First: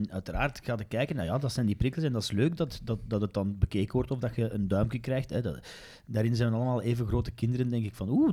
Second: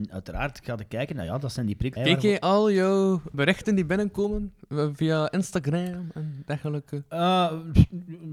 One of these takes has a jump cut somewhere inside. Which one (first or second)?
second